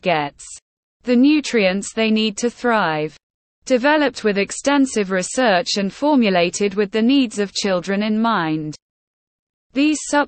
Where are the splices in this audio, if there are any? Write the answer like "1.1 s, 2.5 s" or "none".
3.5 s